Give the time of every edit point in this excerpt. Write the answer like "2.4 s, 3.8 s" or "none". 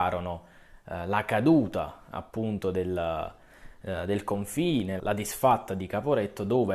5.0 s